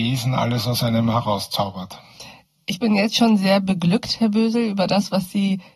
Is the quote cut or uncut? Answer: uncut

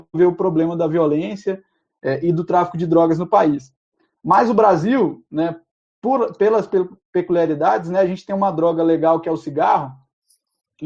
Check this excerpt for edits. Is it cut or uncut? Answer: uncut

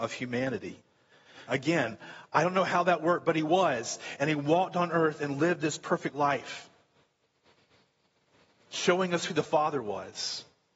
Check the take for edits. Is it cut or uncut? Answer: cut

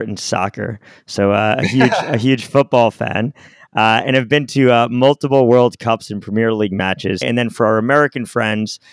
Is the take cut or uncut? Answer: cut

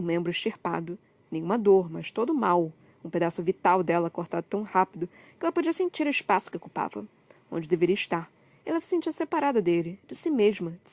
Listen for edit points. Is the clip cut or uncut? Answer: cut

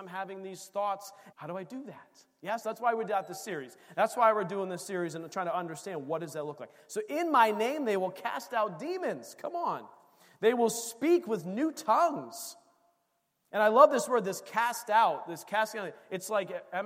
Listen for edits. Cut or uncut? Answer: cut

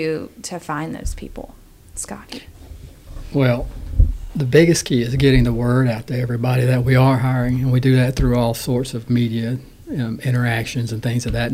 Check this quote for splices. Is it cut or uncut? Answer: uncut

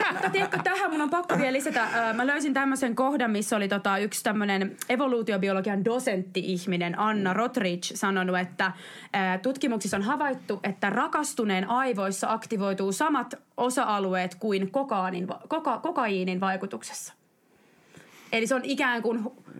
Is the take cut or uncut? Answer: uncut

